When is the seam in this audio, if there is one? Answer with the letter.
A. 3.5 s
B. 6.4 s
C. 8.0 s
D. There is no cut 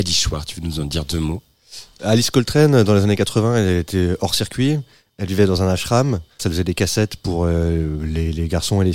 B